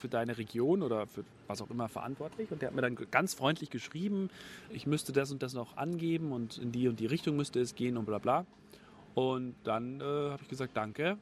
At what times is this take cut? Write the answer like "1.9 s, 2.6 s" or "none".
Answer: 4.7 s, 8.1 s

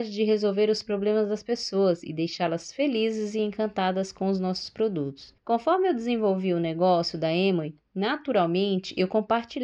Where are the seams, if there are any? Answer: 5.4 s

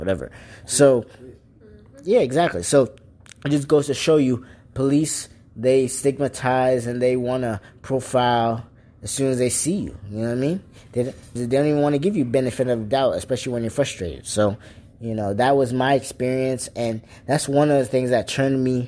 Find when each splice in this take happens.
11.4 s

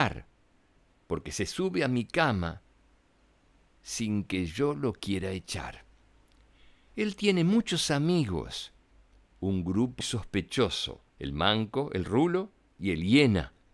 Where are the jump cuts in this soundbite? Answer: 10.0 s, 11.1 s

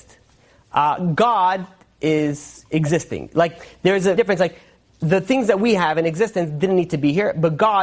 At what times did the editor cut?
4.2 s

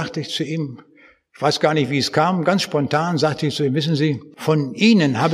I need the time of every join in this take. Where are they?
none

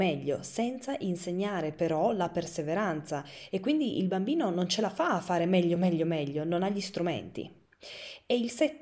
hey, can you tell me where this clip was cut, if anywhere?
none

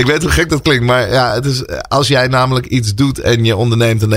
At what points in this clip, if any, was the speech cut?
none

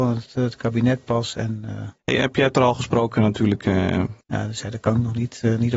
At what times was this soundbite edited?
2.0 s, 4.2 s

